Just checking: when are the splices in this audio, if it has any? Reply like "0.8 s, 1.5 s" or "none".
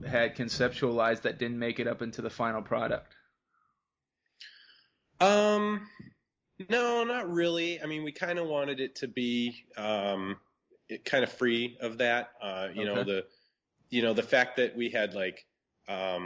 none